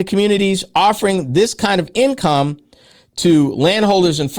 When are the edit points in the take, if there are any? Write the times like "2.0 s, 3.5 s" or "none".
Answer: none